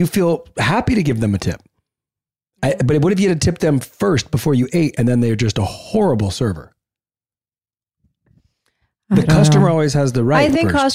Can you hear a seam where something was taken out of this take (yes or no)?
no